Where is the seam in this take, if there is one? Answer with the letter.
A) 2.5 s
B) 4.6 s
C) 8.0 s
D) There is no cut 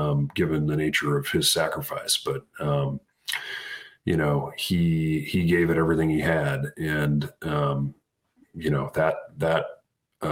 D